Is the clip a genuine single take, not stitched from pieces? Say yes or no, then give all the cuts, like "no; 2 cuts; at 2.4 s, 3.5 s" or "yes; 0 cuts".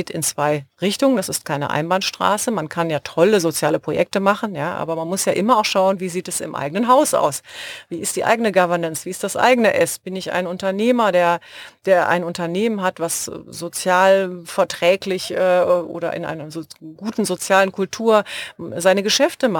yes; 0 cuts